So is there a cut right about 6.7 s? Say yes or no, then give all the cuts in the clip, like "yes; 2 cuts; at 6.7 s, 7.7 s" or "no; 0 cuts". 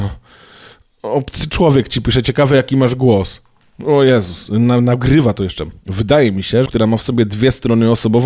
yes; 1 cut; at 6.7 s